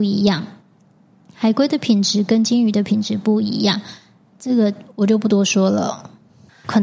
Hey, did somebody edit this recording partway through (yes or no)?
no